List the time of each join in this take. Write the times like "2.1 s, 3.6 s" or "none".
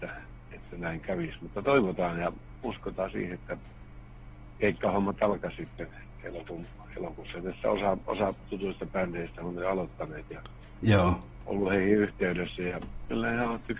none